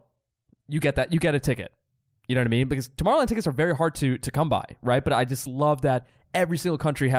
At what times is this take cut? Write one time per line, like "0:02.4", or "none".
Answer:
none